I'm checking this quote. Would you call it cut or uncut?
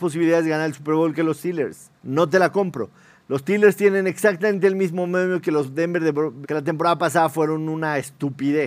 cut